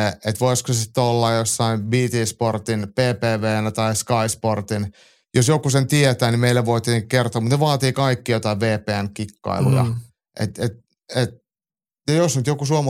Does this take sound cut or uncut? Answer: uncut